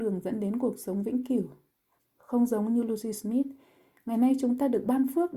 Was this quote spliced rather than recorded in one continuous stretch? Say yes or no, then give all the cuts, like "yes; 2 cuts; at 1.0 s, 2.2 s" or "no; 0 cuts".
yes; 1 cut; at 2.0 s